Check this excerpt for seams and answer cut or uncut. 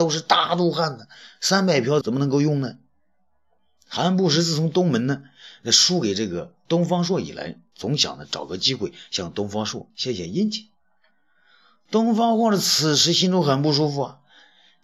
cut